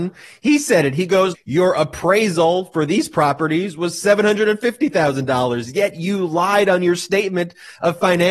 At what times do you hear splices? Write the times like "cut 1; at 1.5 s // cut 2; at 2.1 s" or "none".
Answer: cut 1; at 1.3 s